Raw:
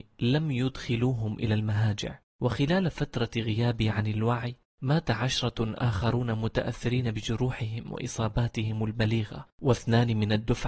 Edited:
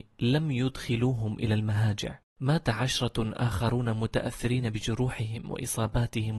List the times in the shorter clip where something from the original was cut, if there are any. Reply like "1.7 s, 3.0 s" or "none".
2.3 s